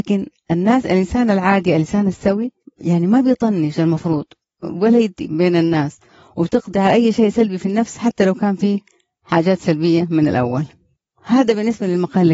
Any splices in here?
yes; 1 cut; at 5.2 s

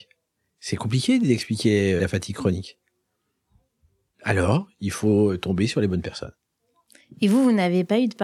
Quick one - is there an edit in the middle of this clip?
yes; 1 cut; at 2.0 s

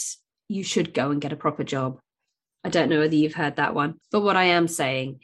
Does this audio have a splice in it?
yes; 1 cut; at 4.0 s

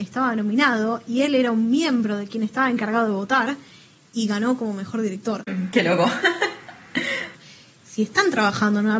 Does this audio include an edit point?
yes; 2 cuts; at 5.5 s, 7.3 s

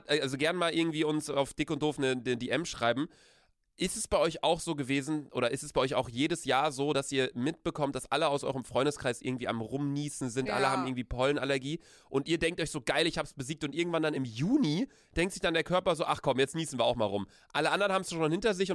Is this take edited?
no; 0 cuts

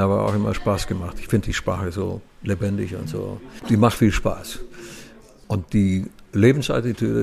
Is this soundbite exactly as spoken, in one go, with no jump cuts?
no; 1 cut; at 4.0 s

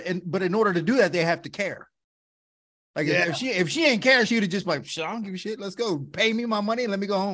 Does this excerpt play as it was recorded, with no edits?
yes; 0 cuts

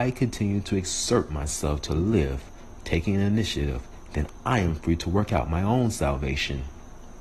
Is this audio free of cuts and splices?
no; 1 cut; at 4.1 s

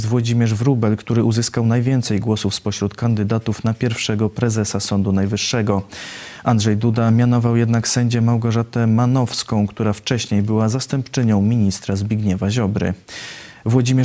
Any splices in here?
no; 0 cuts

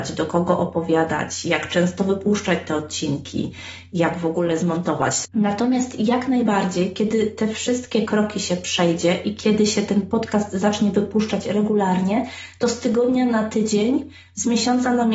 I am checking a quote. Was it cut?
yes; 1 cut; at 5.2 s

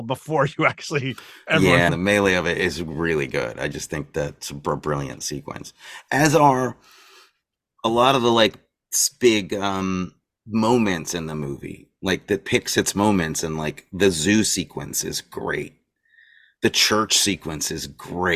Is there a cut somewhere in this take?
yes; 1 cut; at 1.9 s

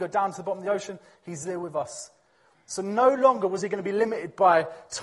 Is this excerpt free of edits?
no; 1 cut; at 2.5 s

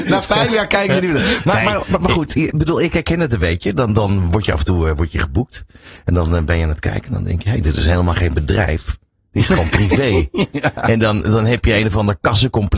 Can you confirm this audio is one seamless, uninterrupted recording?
yes; 0 cuts

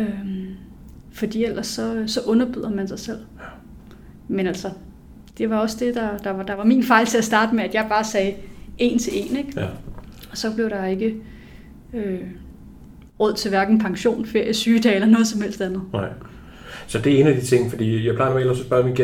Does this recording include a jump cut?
no; 0 cuts

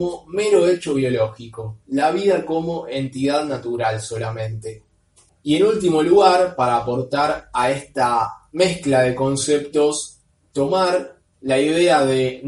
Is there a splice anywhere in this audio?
yes; 1 cut; at 5.3 s

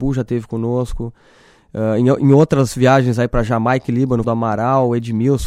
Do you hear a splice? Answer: yes; 1 cut; at 4.2 s

